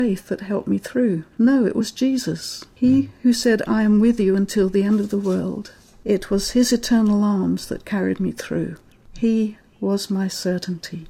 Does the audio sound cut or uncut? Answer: uncut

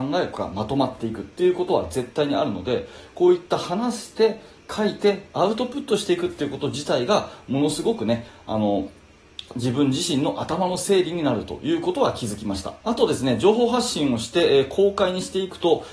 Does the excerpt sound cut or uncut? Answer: cut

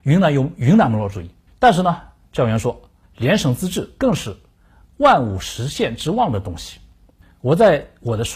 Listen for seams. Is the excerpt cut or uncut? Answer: cut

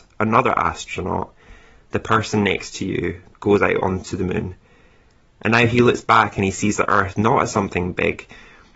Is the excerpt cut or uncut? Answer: uncut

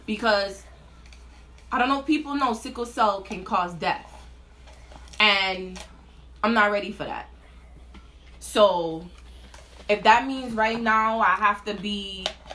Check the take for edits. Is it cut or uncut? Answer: uncut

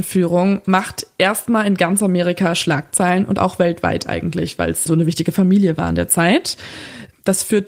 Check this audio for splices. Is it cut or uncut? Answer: cut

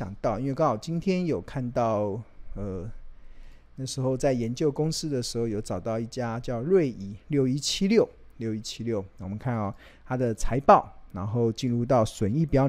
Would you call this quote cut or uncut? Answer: uncut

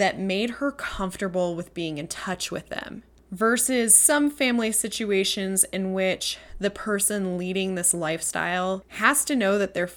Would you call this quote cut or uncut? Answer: uncut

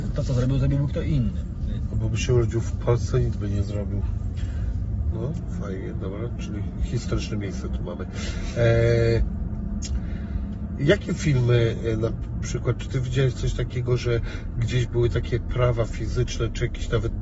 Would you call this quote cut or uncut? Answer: cut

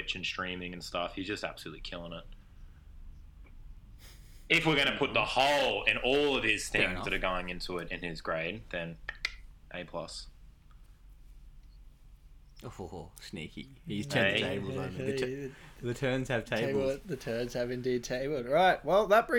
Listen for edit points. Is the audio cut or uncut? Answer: uncut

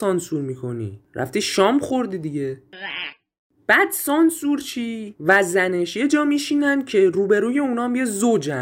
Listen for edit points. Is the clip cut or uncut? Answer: uncut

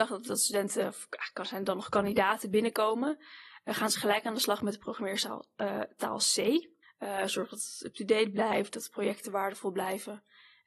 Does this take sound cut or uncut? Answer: cut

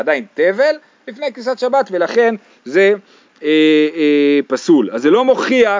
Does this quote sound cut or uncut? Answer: uncut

